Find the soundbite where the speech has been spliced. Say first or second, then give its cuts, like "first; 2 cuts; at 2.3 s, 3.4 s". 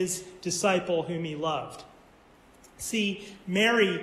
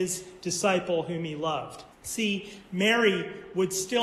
second; 1 cut; at 1.9 s